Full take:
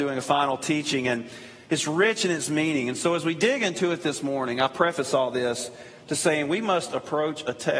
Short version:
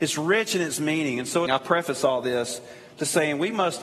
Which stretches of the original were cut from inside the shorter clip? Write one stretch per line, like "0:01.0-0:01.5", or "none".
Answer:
0:03.2-0:04.6